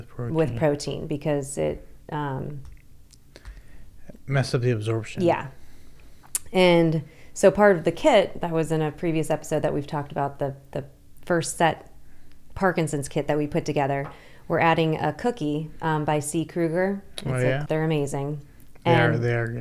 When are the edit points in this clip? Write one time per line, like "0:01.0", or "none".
0:17.7